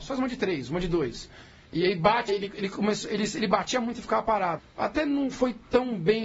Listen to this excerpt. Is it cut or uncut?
cut